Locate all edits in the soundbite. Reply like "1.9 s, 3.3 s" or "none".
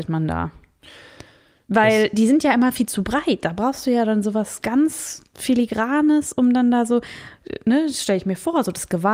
none